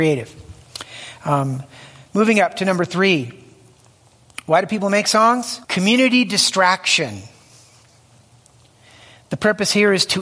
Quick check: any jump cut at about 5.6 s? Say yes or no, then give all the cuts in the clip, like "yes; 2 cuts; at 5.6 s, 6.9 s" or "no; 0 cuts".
yes; 1 cut; at 5.6 s